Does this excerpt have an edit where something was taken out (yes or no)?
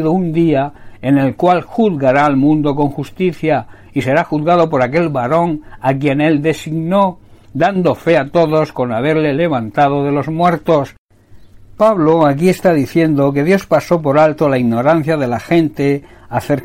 no